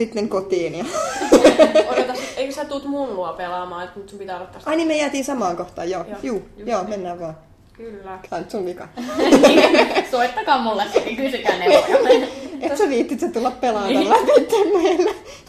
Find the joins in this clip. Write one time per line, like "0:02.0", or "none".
0:08.3